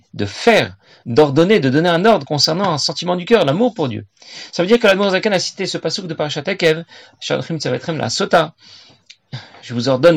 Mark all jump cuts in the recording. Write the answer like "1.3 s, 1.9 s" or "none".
none